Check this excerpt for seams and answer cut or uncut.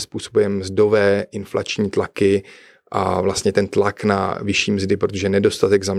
uncut